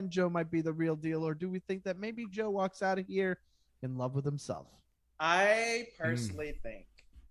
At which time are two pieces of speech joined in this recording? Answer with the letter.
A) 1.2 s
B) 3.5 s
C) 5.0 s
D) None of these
D